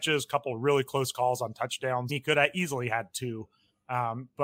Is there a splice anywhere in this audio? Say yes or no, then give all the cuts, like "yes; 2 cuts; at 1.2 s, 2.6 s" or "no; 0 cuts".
yes; 1 cut; at 2.1 s